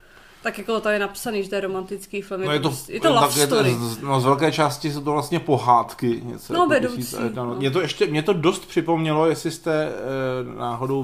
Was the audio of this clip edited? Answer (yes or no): no